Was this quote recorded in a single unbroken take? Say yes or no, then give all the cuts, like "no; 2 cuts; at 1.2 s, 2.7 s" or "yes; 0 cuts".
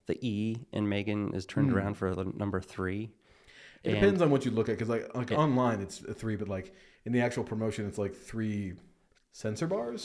yes; 0 cuts